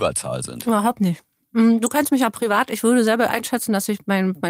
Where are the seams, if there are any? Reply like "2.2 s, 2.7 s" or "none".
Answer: none